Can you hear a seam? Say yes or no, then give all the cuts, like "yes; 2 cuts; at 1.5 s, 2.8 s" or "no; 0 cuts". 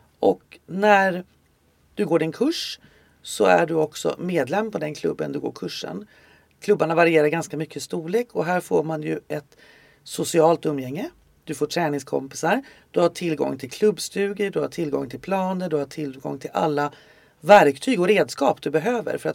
no; 0 cuts